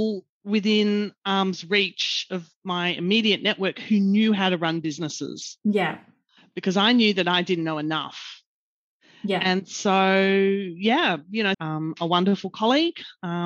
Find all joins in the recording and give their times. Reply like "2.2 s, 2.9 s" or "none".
11.5 s